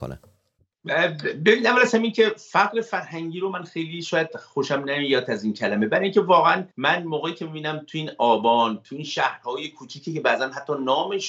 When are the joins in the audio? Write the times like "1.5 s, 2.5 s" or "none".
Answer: 6.7 s